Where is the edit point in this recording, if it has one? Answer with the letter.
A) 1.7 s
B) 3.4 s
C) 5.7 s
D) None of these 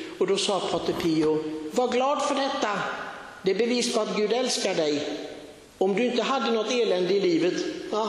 C